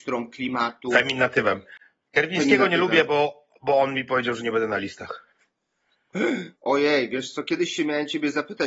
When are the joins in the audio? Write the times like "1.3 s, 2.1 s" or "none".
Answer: 6.5 s